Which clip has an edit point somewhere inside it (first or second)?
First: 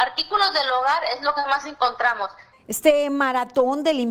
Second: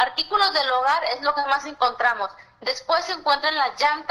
first